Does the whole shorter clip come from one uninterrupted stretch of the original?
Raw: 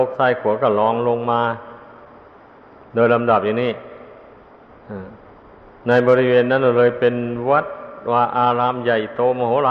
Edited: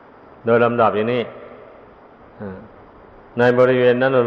yes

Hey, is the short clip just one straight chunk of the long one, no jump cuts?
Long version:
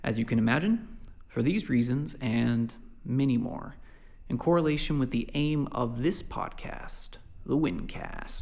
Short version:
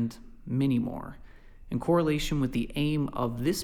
yes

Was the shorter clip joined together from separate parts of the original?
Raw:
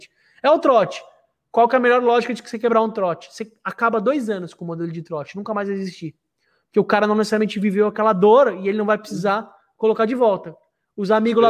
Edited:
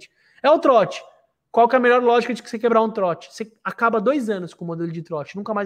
no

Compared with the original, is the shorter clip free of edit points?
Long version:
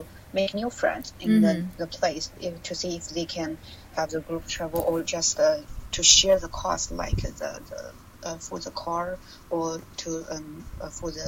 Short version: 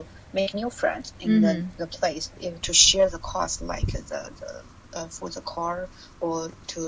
no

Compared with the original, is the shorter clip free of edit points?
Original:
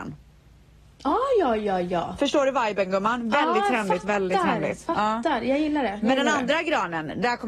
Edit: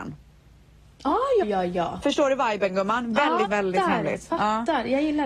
no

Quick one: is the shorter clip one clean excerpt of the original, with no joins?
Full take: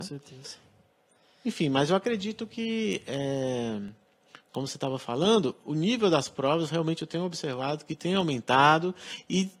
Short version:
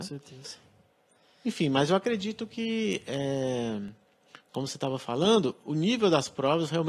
yes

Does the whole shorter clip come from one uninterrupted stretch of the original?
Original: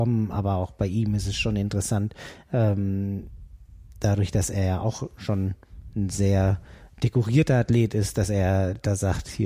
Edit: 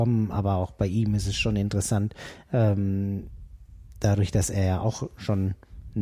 yes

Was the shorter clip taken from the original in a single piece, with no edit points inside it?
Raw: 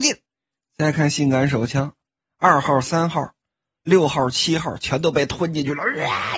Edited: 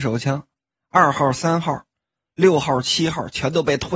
yes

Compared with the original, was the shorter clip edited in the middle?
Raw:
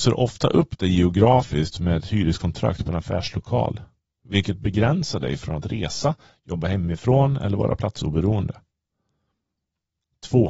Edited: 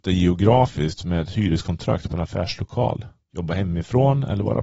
yes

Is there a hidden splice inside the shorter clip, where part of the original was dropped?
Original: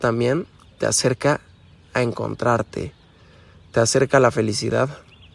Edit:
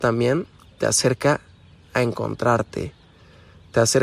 no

